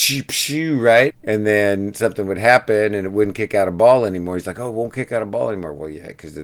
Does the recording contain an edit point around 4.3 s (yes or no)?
no